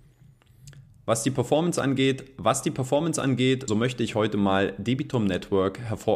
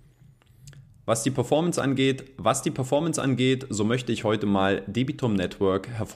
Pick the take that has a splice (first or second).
first